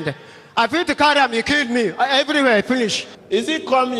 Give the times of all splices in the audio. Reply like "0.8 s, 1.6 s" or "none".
none